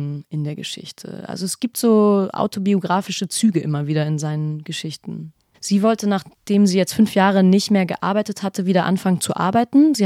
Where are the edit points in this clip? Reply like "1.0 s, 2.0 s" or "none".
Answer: 5.5 s